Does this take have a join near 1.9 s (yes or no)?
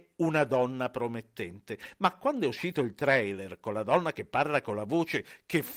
no